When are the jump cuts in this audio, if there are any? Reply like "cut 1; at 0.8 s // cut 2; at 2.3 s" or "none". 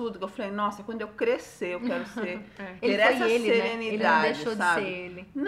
none